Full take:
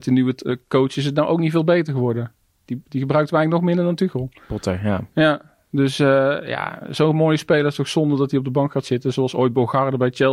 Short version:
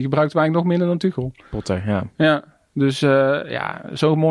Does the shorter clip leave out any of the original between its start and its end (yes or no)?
no